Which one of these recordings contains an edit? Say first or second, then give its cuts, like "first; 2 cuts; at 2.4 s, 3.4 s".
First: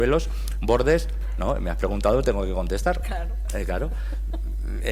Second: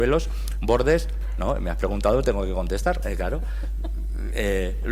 second; 1 cut; at 3.0 s